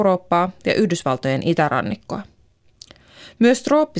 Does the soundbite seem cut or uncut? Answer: uncut